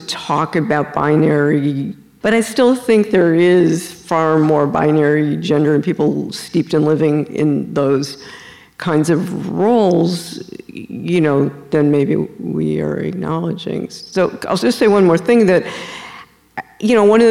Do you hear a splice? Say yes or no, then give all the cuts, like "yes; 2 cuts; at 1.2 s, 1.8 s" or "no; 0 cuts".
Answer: no; 0 cuts